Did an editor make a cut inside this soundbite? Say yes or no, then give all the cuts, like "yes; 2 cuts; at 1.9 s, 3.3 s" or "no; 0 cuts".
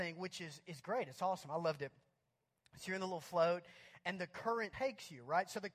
yes; 1 cut; at 4.7 s